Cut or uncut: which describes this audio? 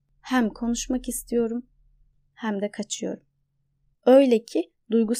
cut